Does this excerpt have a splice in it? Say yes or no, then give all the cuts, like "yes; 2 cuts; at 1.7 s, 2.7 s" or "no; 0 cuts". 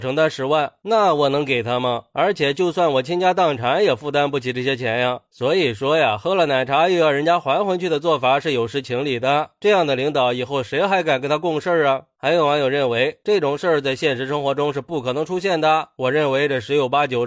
no; 0 cuts